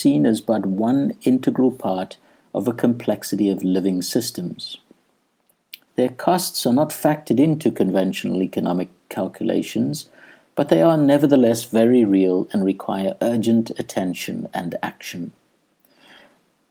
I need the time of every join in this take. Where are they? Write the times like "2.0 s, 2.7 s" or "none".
5.9 s